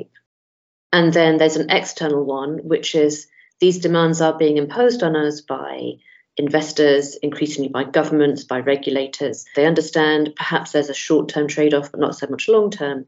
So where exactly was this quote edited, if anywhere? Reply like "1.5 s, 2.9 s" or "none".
9.5 s